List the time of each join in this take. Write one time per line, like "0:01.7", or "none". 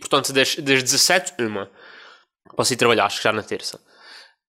0:02.5